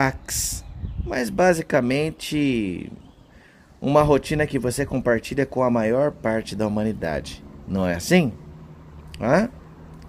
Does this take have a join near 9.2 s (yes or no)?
no